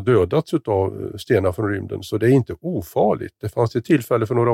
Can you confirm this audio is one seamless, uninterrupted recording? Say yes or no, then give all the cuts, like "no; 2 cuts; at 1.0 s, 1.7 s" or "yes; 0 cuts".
yes; 0 cuts